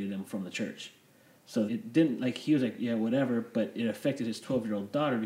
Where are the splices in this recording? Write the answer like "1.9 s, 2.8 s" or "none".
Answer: 1.7 s